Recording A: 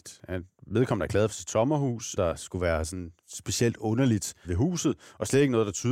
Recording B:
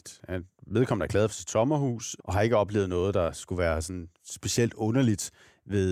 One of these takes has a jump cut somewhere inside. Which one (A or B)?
A